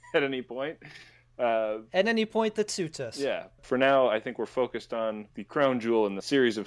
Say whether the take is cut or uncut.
cut